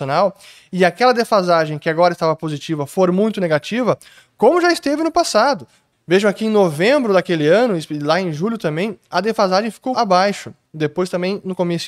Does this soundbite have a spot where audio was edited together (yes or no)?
yes